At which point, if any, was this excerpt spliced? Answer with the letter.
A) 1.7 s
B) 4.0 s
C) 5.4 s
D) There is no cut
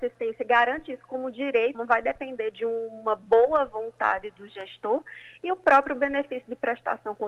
A